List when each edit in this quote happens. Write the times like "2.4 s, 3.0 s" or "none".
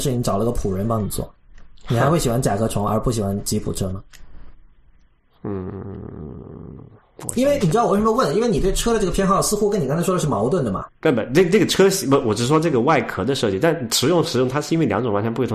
10.9 s